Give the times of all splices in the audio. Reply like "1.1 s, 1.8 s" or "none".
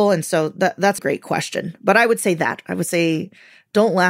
1.0 s